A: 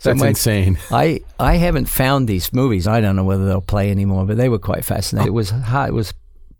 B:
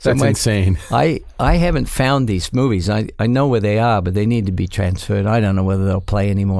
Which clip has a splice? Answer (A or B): A